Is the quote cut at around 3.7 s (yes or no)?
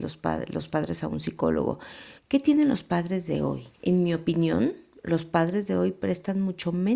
yes